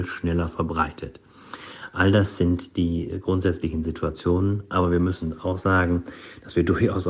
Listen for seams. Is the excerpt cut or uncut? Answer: uncut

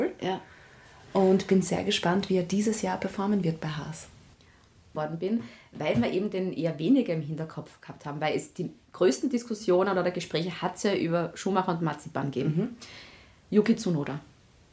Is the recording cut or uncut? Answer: cut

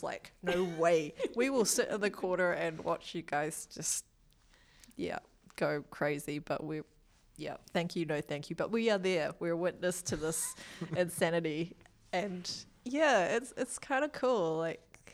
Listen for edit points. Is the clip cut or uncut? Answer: uncut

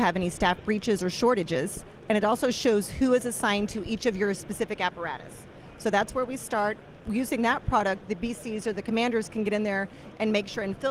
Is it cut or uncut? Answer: cut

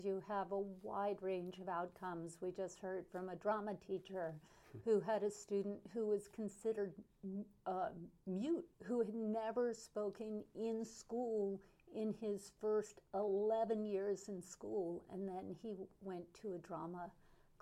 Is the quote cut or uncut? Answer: cut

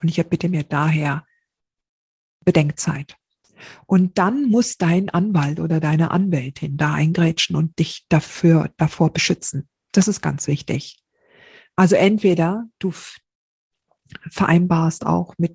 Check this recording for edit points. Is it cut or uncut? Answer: uncut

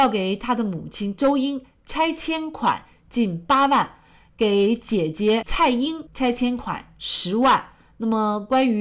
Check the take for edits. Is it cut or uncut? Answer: uncut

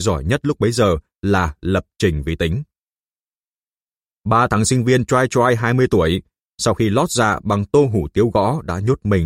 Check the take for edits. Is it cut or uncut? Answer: uncut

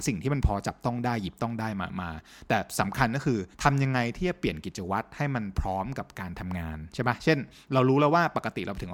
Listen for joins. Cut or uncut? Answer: cut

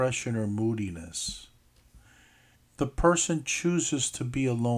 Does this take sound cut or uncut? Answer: cut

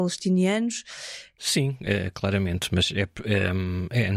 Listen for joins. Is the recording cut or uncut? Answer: cut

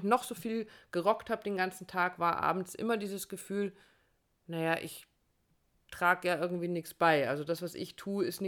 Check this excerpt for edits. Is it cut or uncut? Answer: uncut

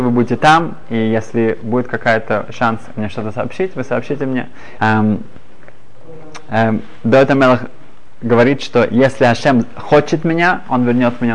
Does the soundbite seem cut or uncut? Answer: cut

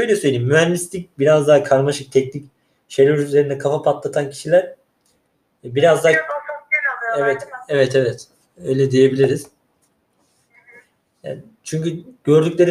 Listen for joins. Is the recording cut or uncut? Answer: uncut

